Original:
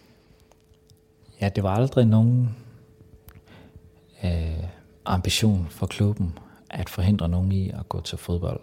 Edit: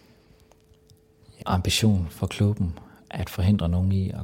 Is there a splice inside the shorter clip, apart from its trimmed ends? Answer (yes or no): yes